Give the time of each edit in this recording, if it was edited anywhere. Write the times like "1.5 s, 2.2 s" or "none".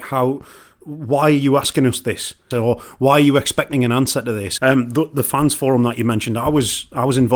2.5 s, 4.6 s